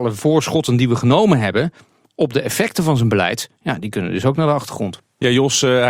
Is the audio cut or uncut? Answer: uncut